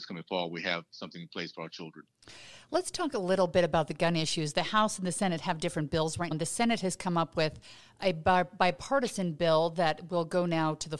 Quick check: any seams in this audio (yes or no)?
yes